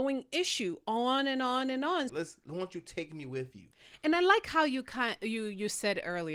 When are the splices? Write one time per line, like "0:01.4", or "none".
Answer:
0:02.1